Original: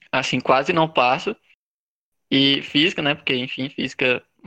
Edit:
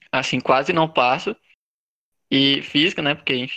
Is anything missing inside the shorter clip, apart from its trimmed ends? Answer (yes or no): no